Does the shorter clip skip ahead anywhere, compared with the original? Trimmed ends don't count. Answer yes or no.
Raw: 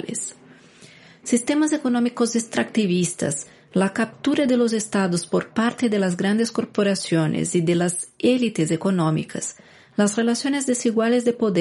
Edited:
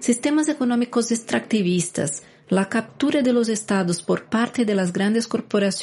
no